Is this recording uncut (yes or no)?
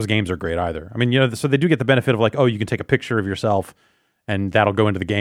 yes